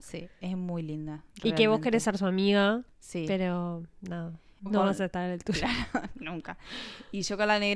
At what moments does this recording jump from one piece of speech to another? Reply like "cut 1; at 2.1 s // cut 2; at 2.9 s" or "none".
cut 1; at 4.7 s